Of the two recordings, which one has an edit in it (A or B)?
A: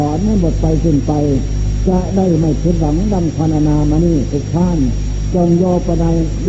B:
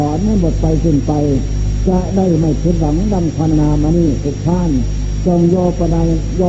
B